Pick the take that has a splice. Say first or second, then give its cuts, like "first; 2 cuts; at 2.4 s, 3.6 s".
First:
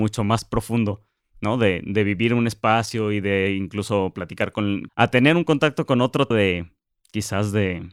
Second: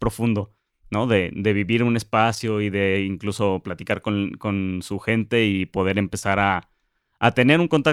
first; 2 cuts; at 4.9 s, 6.3 s